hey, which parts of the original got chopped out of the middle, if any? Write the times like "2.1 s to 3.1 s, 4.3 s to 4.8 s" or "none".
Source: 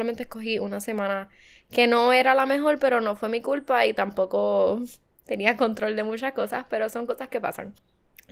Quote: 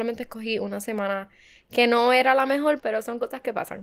2.8 s to 6.7 s